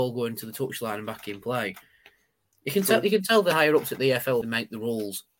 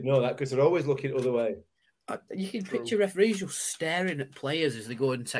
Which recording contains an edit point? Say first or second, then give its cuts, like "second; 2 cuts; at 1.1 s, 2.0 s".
first; 1 cut; at 4.4 s